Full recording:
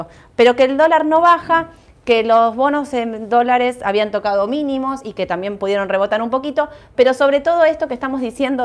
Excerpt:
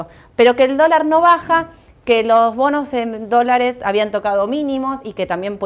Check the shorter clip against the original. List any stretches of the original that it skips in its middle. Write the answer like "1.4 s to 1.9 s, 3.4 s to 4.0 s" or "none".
none